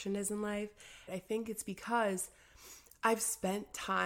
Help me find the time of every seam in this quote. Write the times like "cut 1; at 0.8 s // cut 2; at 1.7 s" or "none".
cut 1; at 1.1 s